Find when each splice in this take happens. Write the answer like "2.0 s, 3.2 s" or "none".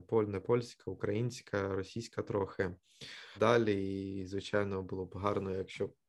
3.4 s